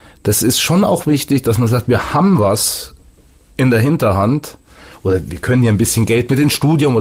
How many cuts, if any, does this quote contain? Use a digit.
0